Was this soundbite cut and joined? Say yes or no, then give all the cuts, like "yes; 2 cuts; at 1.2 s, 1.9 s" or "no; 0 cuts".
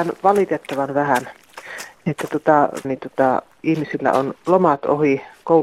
yes; 1 cut; at 2.8 s